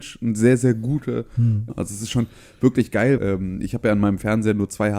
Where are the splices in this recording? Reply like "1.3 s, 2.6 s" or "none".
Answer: 1.7 s, 3.2 s